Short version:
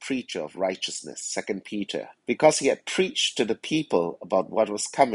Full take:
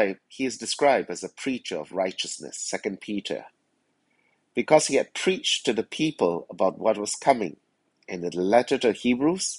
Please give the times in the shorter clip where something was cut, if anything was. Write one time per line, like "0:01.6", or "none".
0:02.2